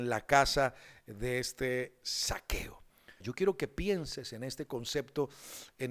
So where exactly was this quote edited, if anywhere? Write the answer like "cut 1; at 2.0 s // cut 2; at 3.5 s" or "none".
cut 1; at 3.2 s